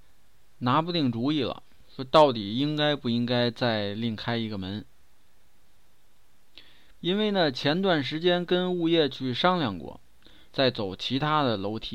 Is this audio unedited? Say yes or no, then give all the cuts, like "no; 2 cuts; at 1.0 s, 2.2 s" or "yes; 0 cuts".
no; 2 cuts; at 7.0 s, 10.5 s